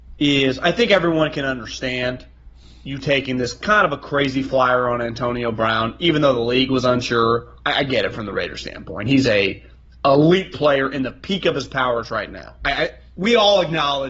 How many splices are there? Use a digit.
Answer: 0